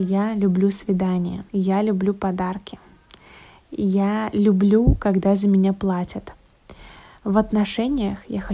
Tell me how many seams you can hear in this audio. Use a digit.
1